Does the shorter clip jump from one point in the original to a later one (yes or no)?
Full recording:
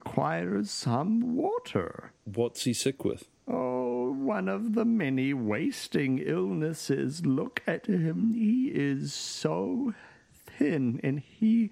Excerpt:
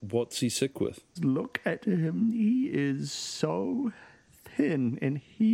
yes